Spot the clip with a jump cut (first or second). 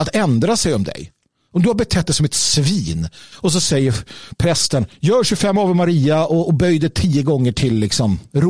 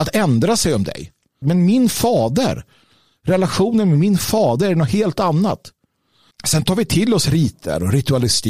second